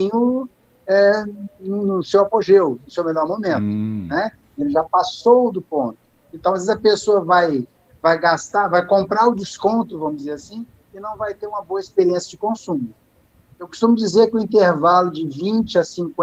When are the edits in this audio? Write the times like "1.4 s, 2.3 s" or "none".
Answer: none